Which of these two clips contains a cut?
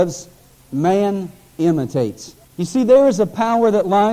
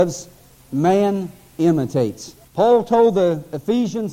first; 1 cut; at 2.5 s

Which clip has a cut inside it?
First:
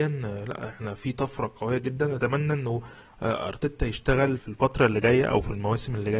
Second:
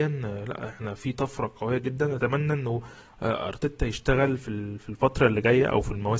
first; 1 cut; at 4.4 s

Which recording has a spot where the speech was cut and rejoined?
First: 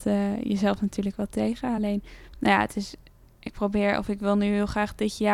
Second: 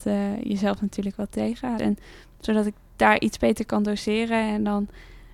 second; 1 cut; at 1.8 s

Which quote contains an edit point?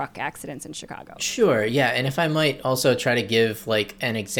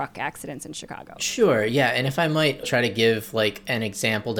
second; 1 cut; at 2.6 s

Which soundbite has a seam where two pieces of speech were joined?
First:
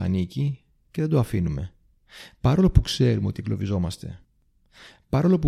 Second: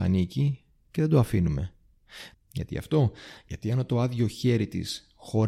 second; 1 cut; at 2.3 s

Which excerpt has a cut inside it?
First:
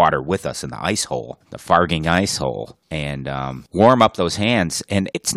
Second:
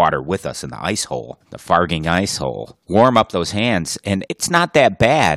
second; 1 cut; at 2.8 s

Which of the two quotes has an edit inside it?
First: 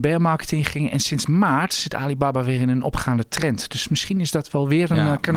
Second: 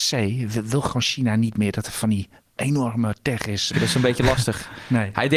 second; 1 cut; at 3.7 s

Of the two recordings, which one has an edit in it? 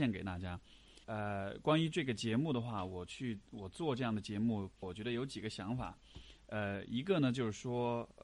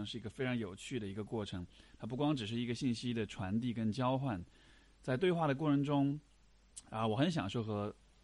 first; 2 cuts; at 1.0 s, 4.8 s

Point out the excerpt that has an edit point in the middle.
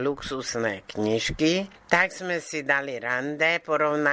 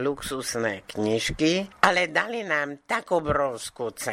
second; 1 cut; at 1.7 s

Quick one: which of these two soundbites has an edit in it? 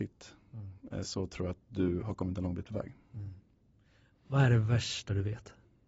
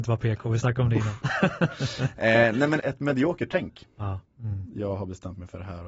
second; 2 cuts; at 2.8 s, 4.3 s

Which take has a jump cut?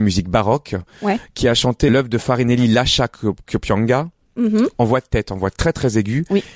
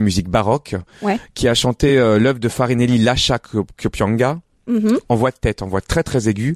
first; 1 cut; at 1.9 s

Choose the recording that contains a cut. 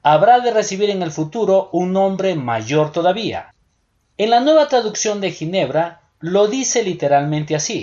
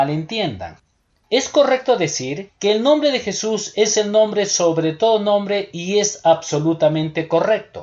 second; 1 cut; at 2.5 s

